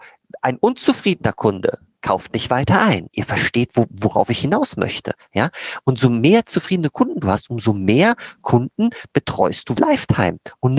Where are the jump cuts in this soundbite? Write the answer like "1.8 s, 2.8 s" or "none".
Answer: 9.8 s